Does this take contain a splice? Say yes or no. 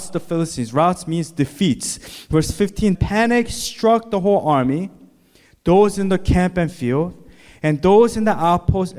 yes